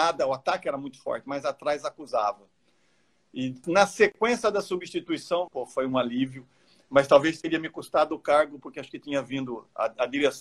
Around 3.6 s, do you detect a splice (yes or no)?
yes